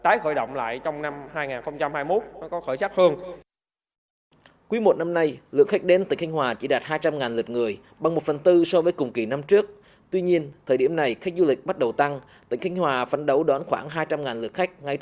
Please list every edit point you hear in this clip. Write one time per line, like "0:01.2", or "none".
none